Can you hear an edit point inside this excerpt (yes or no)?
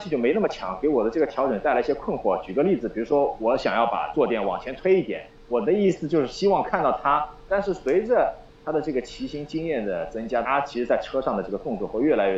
yes